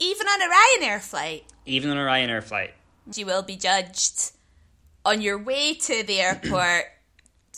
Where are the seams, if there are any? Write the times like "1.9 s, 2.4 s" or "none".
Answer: 3.1 s